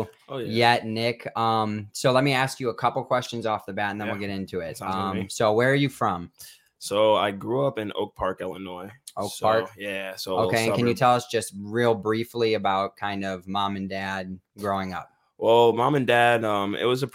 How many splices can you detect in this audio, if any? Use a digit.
0